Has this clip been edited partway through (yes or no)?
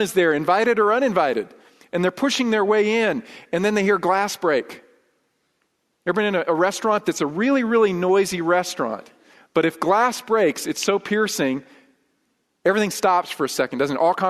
no